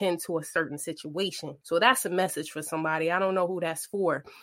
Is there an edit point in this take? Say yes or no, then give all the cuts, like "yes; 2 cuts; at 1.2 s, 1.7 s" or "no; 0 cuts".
no; 0 cuts